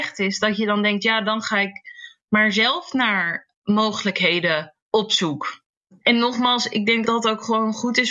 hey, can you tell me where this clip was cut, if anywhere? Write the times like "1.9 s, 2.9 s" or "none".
4.8 s, 7.0 s

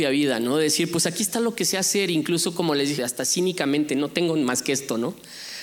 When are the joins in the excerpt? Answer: 3.0 s

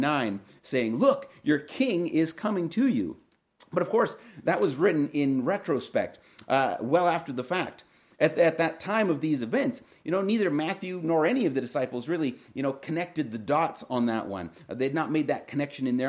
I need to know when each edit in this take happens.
none

